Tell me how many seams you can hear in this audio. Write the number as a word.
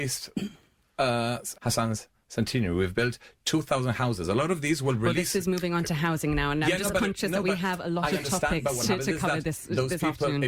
one